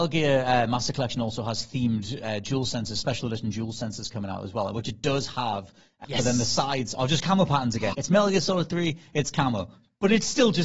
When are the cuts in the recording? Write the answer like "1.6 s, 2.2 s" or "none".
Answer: 6.0 s, 7.9 s